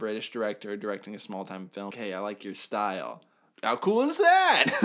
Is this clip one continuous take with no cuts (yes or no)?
no